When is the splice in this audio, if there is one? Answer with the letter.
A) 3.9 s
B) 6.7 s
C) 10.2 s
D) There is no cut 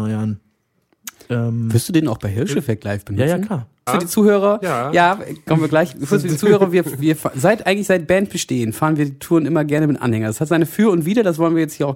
A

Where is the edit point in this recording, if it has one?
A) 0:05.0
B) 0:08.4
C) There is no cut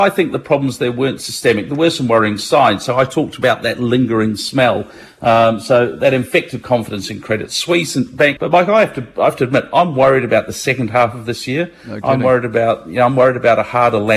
B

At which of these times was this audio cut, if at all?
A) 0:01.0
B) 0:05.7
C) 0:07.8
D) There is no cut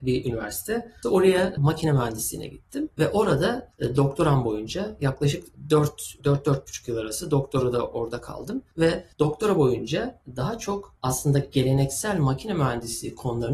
A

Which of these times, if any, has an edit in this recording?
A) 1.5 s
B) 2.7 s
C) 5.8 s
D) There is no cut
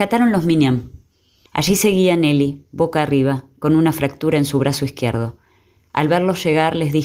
A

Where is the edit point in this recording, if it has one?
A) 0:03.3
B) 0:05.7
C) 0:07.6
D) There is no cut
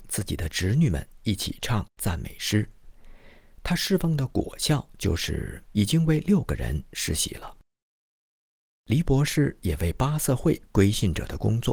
B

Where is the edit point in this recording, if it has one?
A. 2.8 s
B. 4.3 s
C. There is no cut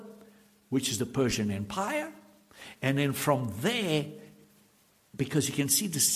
C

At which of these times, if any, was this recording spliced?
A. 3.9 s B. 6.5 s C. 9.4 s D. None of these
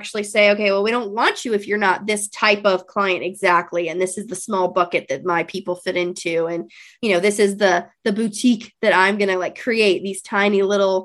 D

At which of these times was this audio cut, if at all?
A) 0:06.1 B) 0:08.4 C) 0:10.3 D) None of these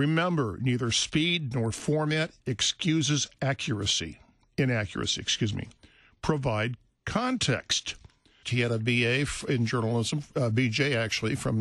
B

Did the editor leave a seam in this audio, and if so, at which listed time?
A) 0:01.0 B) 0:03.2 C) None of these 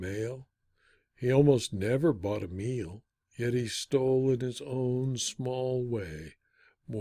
B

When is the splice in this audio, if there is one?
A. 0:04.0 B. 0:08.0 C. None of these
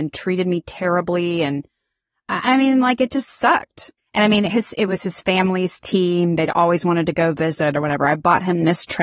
A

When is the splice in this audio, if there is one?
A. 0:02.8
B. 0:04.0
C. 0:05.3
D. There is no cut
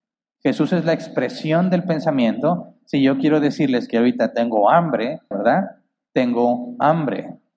C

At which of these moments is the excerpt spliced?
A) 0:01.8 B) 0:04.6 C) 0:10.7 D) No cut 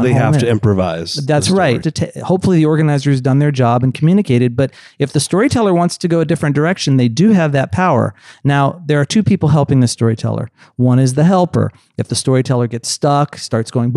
A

